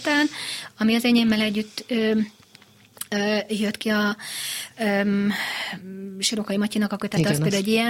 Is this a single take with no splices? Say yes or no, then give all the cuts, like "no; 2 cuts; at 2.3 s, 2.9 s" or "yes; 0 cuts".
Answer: yes; 0 cuts